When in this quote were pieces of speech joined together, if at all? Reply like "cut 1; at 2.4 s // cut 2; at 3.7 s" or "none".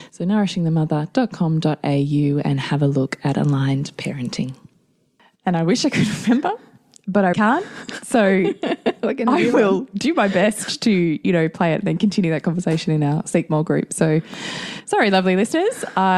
cut 1; at 7.3 s